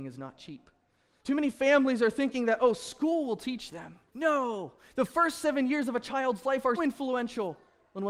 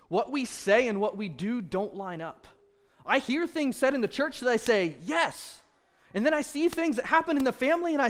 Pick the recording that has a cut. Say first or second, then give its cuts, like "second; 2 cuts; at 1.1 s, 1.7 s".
first; 3 cuts; at 1.2 s, 4.1 s, 6.8 s